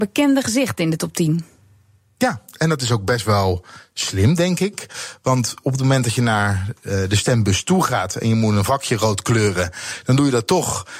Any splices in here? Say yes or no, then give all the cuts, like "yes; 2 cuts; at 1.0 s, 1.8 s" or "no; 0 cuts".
no; 0 cuts